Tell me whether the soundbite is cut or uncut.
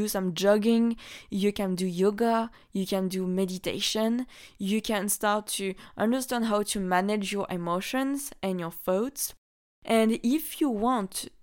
uncut